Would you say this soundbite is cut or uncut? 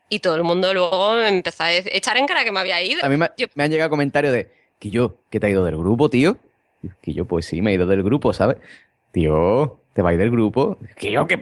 cut